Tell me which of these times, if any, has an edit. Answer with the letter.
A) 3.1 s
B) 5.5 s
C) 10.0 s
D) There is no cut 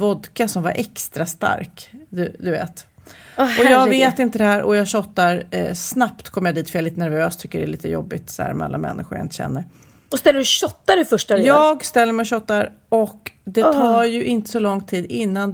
D